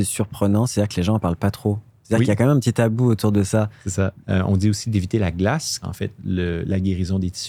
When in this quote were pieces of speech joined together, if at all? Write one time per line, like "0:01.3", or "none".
0:04.2
0:05.8